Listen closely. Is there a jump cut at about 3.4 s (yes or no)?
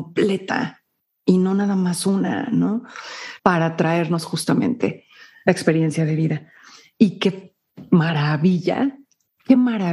yes